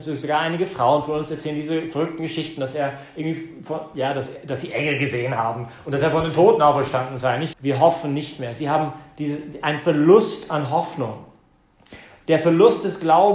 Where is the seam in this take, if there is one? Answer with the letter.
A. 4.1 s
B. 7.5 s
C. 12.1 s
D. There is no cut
B